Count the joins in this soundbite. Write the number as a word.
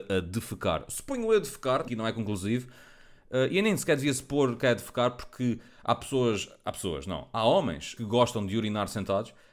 two